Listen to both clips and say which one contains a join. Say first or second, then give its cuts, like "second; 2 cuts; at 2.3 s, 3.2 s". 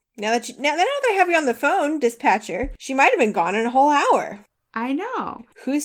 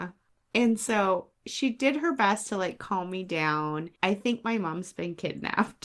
second; 1 cut; at 4.0 s